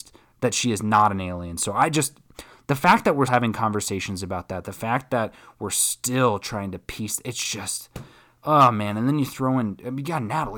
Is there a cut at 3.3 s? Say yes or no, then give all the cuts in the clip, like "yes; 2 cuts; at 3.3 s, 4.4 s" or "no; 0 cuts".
yes; 1 cut; at 3.3 s